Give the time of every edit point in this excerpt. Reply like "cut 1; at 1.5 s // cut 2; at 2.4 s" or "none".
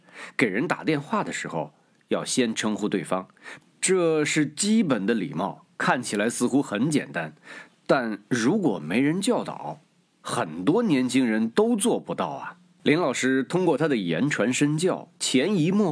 cut 1; at 3.6 s // cut 2; at 12.8 s